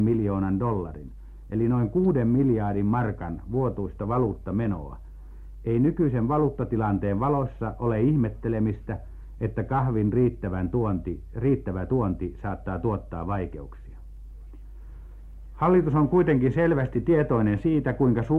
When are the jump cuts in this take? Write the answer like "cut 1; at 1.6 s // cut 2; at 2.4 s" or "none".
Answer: none